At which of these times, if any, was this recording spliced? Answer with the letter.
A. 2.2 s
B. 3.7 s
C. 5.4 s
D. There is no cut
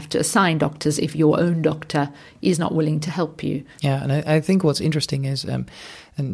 B